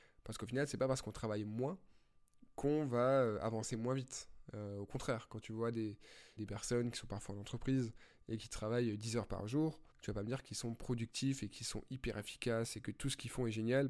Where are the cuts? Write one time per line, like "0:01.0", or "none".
0:06.4
0:09.9